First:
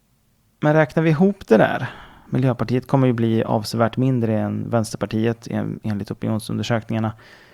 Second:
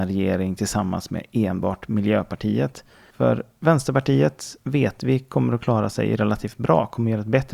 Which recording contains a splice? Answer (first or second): second